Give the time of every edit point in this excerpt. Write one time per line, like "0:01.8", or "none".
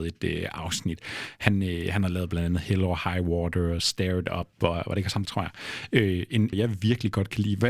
0:05.3
0:06.5